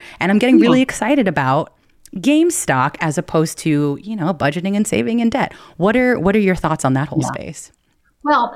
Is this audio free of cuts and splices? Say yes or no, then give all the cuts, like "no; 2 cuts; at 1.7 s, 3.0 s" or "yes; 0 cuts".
yes; 0 cuts